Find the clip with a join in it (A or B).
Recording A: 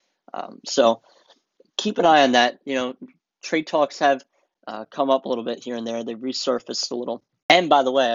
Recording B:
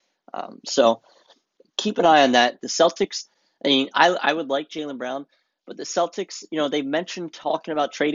B